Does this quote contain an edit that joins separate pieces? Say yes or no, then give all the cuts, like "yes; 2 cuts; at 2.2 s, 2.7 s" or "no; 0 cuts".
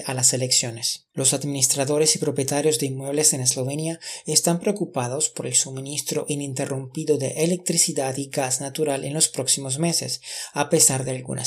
yes; 1 cut; at 1.1 s